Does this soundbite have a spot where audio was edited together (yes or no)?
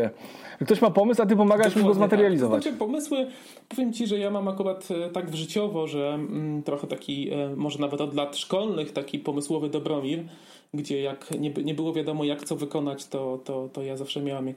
no